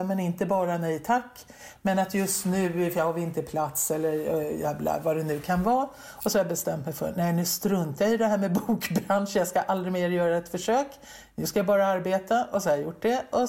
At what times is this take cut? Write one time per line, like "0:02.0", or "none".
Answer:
none